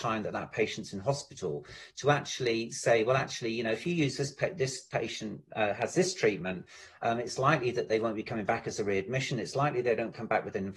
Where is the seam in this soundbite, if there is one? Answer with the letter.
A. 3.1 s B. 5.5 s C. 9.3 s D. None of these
D